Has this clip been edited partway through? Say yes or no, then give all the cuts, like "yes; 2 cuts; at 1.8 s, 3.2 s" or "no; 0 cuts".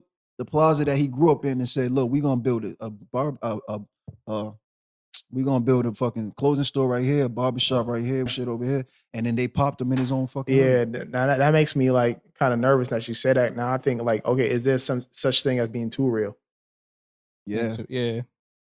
yes; 1 cut; at 8.3 s